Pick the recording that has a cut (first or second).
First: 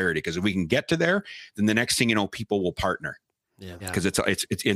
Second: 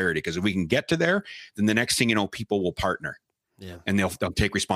first